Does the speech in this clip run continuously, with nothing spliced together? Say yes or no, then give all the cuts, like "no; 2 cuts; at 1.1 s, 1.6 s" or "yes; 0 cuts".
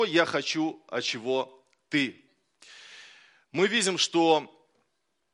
yes; 0 cuts